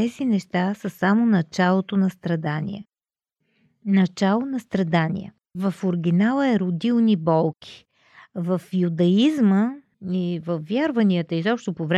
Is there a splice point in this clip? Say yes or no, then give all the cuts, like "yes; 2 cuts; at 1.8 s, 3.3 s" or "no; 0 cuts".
no; 0 cuts